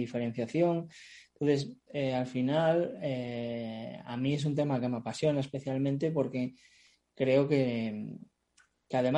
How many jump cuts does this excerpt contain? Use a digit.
1